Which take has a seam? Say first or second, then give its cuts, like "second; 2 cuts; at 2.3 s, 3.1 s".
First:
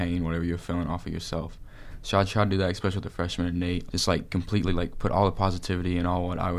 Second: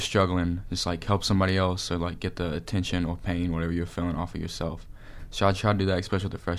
first; 1 cut; at 3.9 s